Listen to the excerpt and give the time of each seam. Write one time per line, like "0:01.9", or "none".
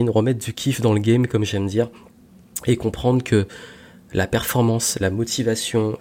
none